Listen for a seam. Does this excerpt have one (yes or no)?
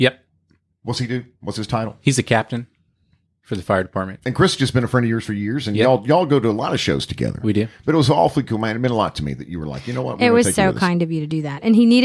no